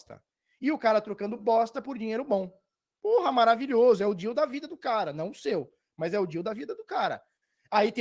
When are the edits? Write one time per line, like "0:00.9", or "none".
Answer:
none